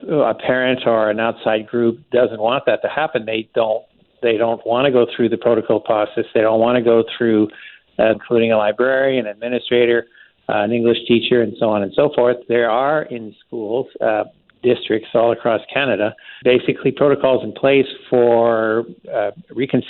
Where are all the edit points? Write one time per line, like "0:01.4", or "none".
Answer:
0:08.1
0:12.4
0:16.4